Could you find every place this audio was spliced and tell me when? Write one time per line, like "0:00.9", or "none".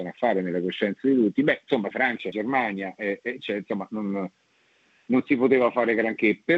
0:01.9

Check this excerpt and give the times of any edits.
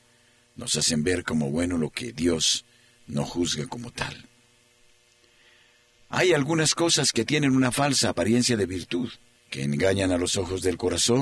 0:09.4

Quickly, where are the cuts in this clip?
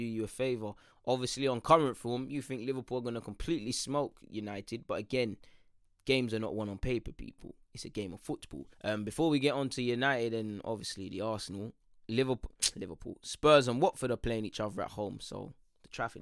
0:08.7

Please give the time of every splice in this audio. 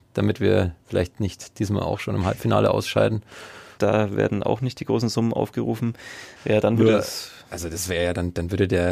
0:03.8
0:06.4

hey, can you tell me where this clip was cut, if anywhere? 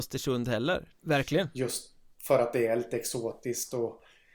0:00.9

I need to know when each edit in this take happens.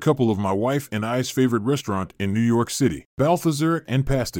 0:03.1

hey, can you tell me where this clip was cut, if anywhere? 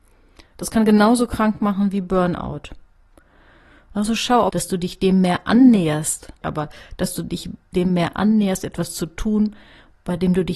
0:04.5
0:06.4

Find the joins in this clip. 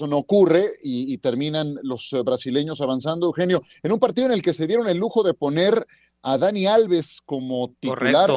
none

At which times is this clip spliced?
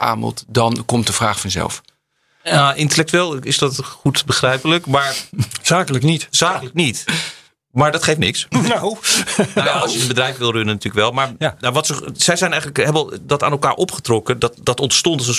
0:08.5

